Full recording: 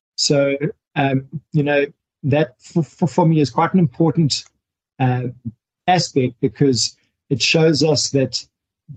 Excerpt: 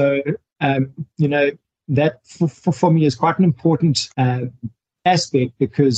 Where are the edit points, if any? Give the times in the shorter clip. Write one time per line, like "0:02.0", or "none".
0:04.1

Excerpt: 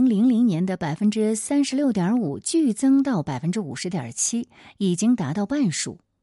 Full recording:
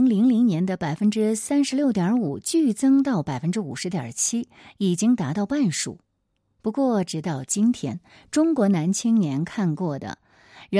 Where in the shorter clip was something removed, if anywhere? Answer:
none

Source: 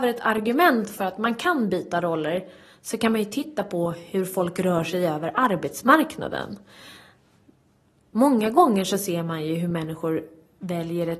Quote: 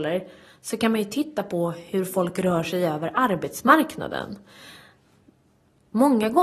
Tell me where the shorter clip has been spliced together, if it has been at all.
none

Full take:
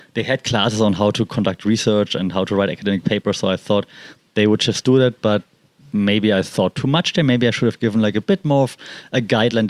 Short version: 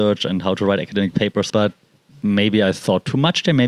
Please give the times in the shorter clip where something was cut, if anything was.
0:01.5

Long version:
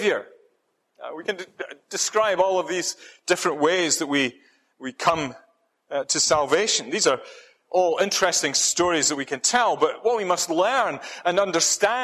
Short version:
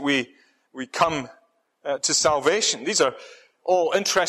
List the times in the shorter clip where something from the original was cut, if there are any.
none

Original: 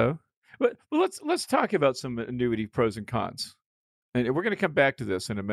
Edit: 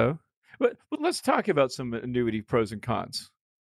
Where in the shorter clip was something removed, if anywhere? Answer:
0:00.9

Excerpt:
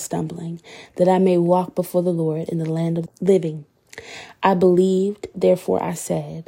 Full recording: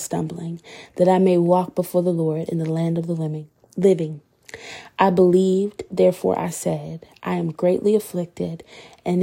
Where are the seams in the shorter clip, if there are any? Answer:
0:03.1

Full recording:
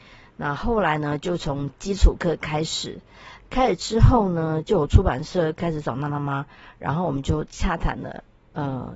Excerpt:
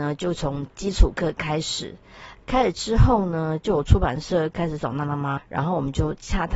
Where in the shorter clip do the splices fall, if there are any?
0:05.4

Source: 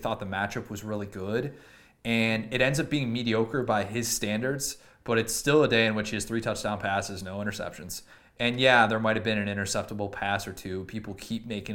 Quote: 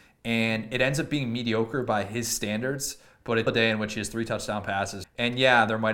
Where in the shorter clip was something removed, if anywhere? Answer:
0:03.5
0:05.0

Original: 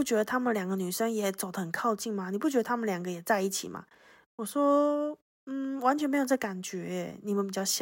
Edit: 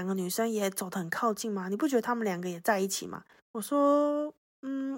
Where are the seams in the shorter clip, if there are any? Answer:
0:03.4

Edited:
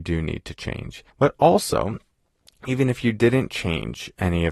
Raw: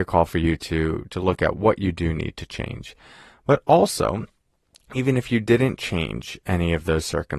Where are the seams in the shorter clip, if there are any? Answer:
0:01.1

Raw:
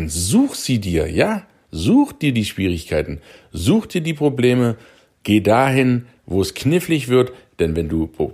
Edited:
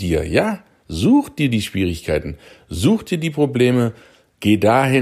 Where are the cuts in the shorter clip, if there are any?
none

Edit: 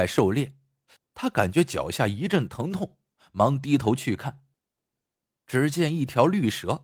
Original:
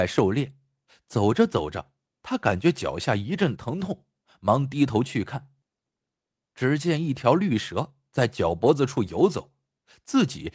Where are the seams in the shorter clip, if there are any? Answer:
0:01.0

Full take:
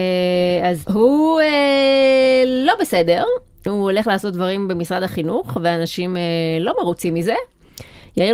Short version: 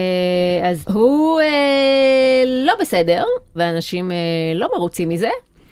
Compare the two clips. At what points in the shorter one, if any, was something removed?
0:03.5

